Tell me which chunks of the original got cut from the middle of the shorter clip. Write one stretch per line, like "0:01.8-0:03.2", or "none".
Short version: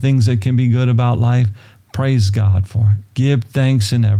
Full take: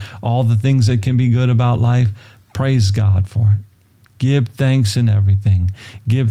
0:03.7-0:04.1